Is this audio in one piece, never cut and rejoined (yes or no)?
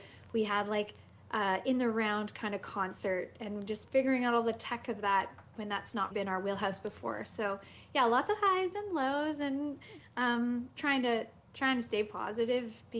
no